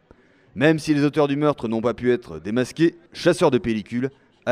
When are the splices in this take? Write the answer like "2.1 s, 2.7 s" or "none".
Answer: 3.1 s